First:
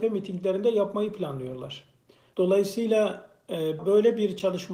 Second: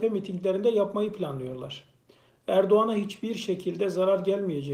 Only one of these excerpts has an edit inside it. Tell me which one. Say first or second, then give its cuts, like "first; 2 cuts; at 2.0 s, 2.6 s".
first; 2 cuts; at 2.3 s, 3.8 s